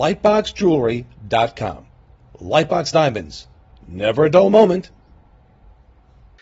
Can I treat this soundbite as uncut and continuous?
yes; 0 cuts

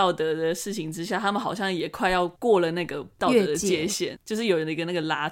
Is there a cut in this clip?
yes; 1 cut; at 4.1 s

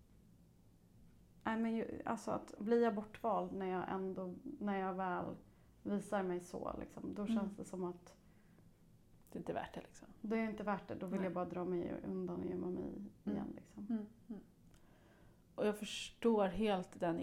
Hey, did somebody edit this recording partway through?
yes; 1 cut; at 2.6 s

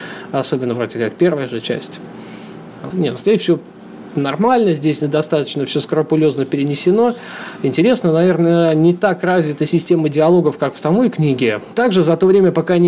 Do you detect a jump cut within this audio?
yes; 2 cuts; at 2.9 s, 11.7 s

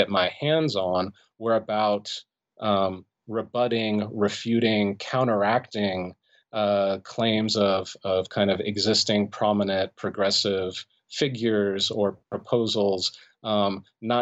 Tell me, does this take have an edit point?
no; 0 cuts

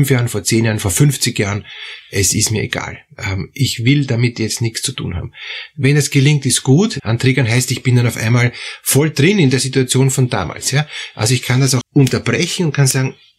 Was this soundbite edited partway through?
yes; 2 cuts; at 7.0 s, 11.8 s

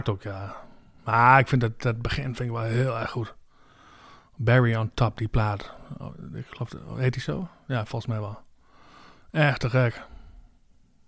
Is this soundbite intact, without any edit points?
yes; 0 cuts

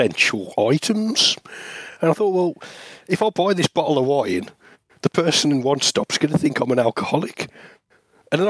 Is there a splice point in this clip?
no; 0 cuts

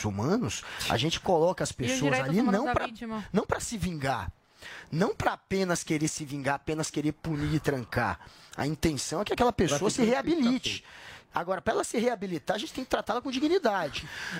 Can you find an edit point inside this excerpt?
no; 0 cuts

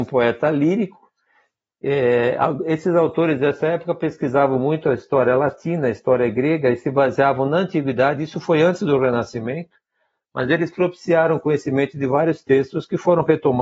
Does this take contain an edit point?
no; 0 cuts

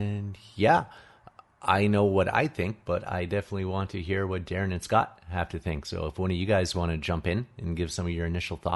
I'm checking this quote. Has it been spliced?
no; 0 cuts

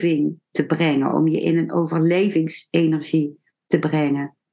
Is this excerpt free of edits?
yes; 0 cuts

